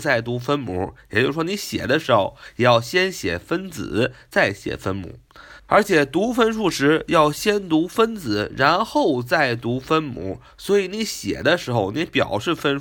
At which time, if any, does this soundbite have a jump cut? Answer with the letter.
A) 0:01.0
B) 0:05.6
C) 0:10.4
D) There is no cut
B